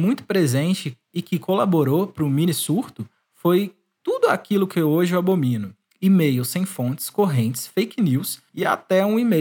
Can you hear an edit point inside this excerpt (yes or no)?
no